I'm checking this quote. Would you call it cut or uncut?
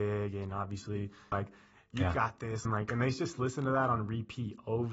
cut